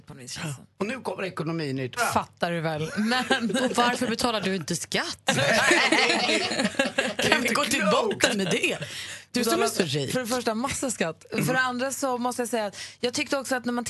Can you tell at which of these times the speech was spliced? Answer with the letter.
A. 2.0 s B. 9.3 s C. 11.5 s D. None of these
A